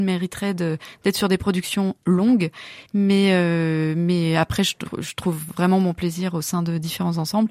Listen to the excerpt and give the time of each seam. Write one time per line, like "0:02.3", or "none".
0:02.9